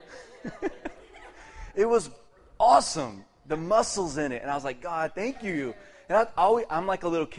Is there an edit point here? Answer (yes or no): no